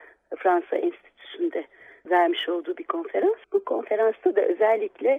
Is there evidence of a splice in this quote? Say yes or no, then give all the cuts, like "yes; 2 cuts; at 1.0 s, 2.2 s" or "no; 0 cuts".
yes; 1 cut; at 3.4 s